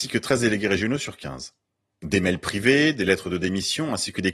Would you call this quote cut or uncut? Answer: uncut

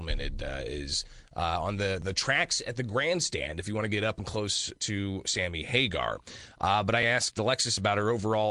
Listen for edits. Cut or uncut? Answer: uncut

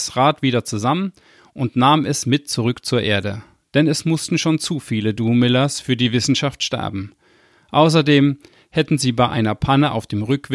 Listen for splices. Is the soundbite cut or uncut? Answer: uncut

